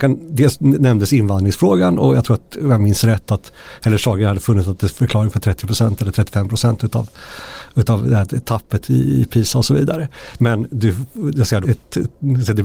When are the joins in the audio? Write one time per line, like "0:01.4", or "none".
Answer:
0:10.4
0:11.6